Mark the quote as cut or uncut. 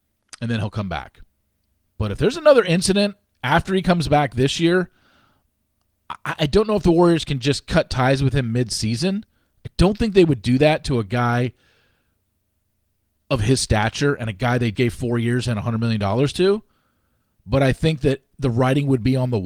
cut